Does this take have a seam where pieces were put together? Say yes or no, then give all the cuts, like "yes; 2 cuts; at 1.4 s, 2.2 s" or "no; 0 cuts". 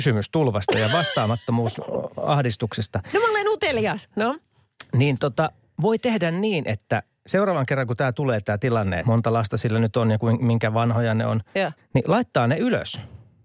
yes; 2 cuts; at 9.0 s, 11.8 s